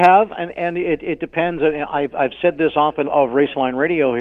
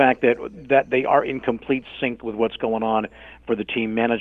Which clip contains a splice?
first; 1 cut; at 3.0 s

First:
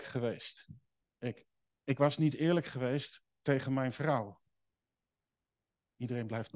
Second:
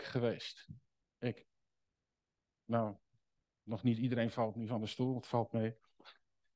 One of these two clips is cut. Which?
first; 1 cut; at 1.7 s

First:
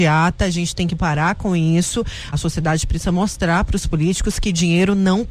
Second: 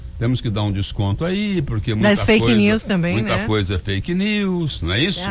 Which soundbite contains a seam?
first; 1 cut; at 2.3 s

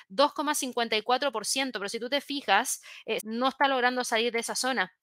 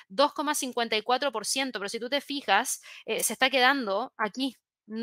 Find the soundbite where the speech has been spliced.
first; 1 cut; at 3.2 s

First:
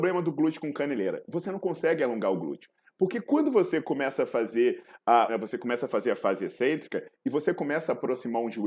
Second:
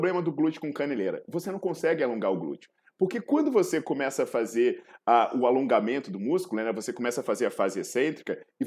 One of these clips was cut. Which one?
first; 1 cut; at 5.3 s

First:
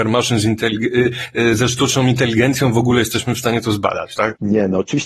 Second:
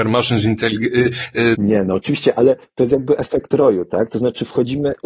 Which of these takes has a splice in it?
second; 1 cut; at 1.5 s

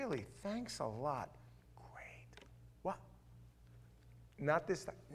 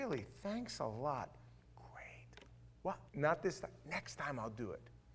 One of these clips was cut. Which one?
second; 1 cut; at 3.1 s

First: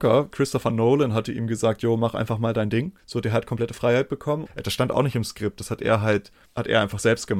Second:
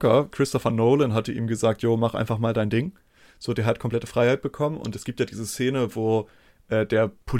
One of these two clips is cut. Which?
first; 2 cuts; at 3.0 s, 4.5 s

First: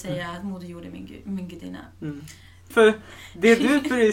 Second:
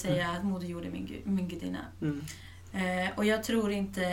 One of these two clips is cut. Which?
first; 1 cut; at 2.7 s

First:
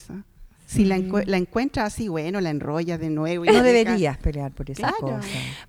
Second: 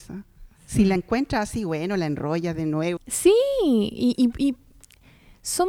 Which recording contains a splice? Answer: second; 2 cuts; at 1.0 s, 3.0 s

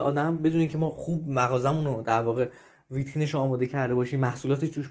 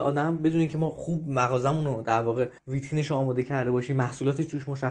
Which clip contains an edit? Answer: second; 1 cut; at 2.6 s

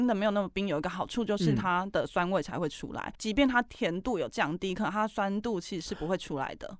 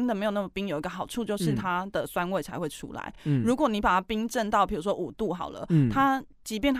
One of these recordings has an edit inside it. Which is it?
first; 1 cut; at 3.2 s

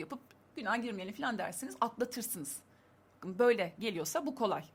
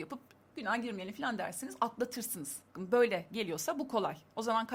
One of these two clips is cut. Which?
second; 1 cut; at 2.7 s

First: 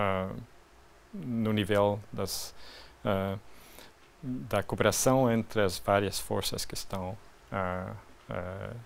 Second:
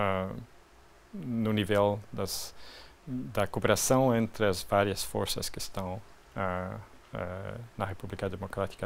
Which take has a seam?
second; 1 cut; at 2.9 s

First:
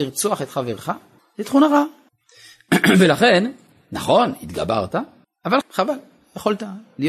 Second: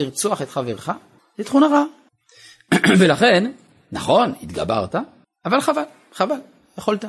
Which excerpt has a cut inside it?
first; 1 cut; at 5.6 s

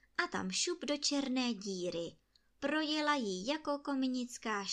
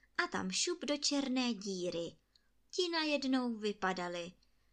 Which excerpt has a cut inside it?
second; 1 cut; at 2.6 s

